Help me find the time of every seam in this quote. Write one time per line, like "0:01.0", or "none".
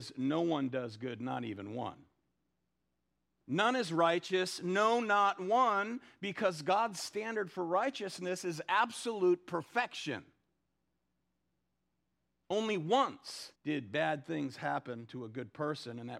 0:13.6